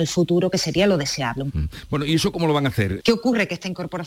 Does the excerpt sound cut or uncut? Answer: cut